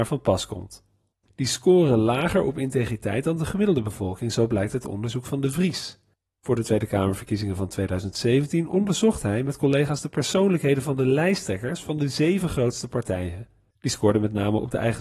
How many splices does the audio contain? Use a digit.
1